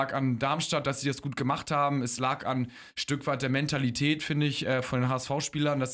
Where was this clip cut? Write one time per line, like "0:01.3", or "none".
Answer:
none